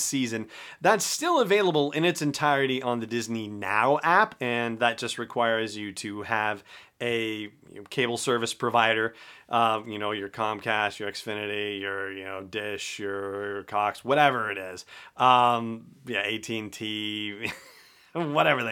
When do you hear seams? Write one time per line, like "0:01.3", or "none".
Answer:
none